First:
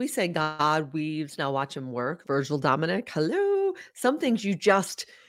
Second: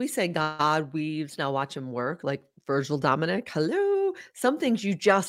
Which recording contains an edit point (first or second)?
first